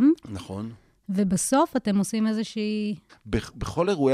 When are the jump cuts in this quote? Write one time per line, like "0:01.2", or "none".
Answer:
0:03.1